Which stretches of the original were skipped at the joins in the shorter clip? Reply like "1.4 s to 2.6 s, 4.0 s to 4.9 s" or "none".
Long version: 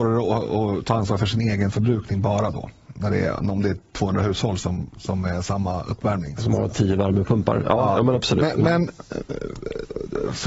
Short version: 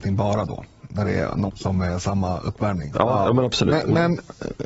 3.5 s to 4.9 s, 6.4 s to 7.6 s